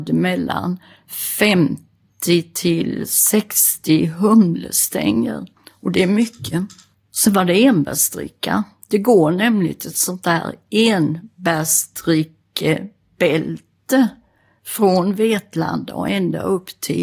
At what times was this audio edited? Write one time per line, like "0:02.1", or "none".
0:06.9